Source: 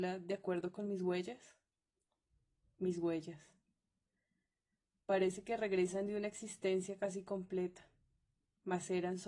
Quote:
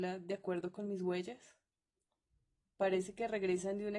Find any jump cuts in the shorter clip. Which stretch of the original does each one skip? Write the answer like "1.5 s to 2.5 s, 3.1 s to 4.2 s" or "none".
2.6 s to 4.9 s